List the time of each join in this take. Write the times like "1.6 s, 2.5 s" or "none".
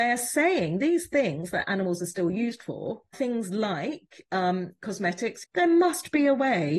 3.1 s, 5.4 s